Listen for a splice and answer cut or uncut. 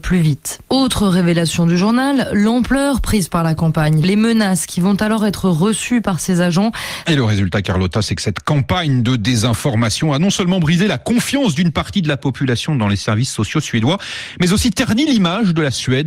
cut